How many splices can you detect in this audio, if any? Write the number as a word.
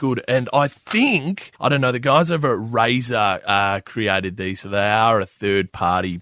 one